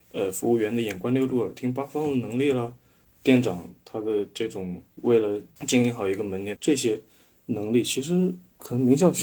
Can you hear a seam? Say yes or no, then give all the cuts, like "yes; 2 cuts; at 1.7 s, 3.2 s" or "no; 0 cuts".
yes; 1 cut; at 6.6 s